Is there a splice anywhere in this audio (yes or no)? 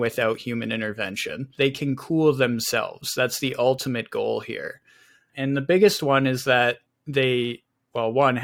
yes